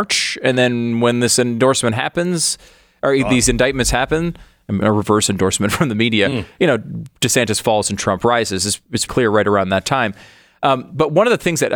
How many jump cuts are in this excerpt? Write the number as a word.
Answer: two